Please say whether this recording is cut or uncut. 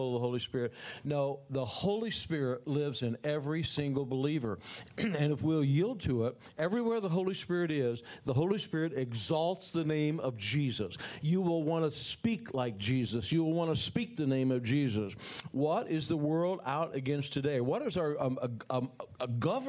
uncut